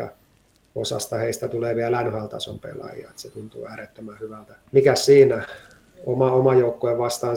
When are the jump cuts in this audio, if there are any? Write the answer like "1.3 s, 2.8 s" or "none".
none